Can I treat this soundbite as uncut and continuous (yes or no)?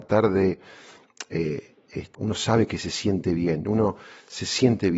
no